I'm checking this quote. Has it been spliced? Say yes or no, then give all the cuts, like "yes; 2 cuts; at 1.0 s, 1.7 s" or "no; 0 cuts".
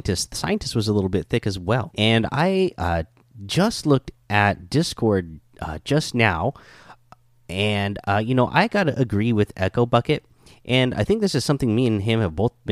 yes; 1 cut; at 1.9 s